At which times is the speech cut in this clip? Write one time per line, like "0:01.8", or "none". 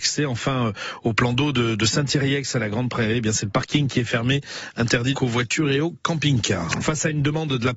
0:05.1
0:06.8